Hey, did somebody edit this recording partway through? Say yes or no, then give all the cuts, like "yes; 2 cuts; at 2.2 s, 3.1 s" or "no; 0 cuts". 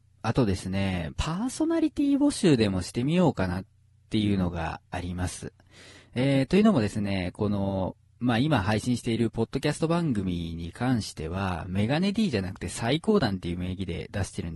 yes; 1 cut; at 1.1 s